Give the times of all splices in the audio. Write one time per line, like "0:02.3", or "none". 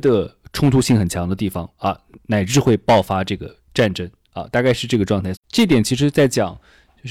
0:05.4